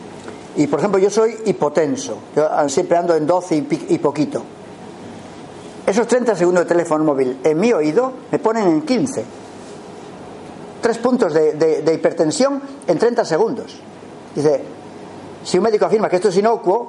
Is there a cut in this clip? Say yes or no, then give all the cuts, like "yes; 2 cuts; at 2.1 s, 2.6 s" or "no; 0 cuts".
yes; 1 cut; at 2.7 s